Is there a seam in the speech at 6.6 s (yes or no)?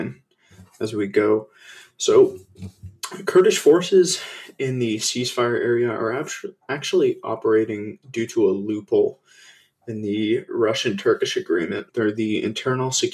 no